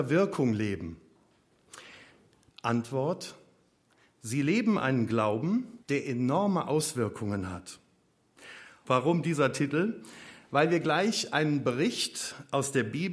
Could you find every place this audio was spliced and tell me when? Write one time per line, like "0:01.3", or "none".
0:02.5
0:05.8
0:08.8